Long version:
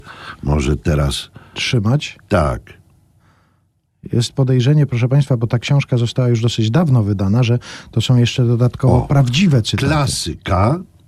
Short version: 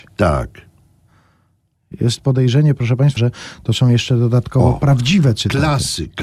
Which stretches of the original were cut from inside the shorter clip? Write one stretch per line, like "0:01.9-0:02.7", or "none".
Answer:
0:05.3-0:07.4